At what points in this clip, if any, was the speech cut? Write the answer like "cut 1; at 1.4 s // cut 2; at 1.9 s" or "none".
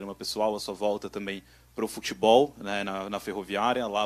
none